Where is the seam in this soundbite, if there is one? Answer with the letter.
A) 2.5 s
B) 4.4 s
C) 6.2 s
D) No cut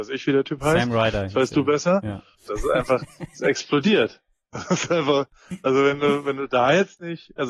A